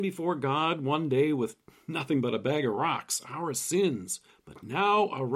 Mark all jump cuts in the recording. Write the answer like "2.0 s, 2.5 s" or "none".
4.3 s